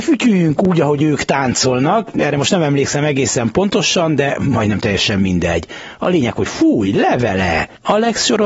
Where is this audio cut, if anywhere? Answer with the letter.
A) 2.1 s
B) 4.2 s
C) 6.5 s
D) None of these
C